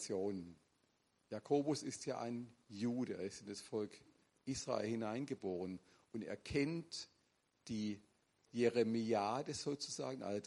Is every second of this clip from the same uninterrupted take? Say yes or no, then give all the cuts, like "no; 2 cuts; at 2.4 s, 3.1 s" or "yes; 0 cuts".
yes; 0 cuts